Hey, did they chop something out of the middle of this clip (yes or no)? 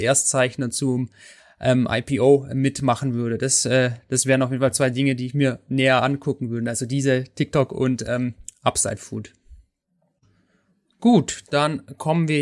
no